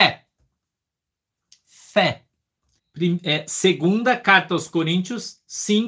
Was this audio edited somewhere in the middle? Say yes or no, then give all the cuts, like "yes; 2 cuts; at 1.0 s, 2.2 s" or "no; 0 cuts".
yes; 1 cut; at 2.8 s